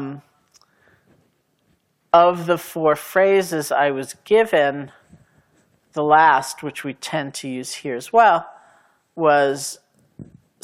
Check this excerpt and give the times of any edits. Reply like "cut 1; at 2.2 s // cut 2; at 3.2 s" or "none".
none